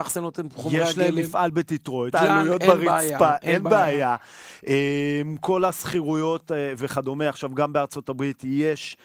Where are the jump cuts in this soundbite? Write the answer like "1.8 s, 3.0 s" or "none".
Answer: 2.1 s